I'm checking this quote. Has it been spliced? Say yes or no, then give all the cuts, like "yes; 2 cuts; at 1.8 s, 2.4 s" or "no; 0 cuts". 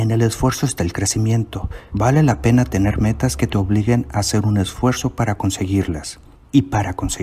yes; 1 cut; at 1.9 s